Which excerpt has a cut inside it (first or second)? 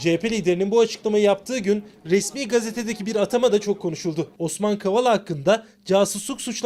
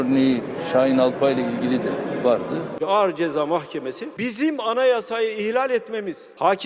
second